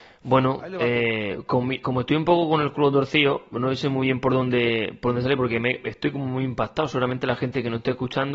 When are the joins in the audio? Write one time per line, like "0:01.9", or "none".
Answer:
0:01.8